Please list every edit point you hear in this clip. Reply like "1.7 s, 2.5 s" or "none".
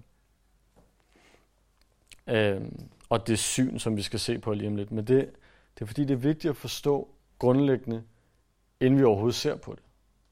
2.2 s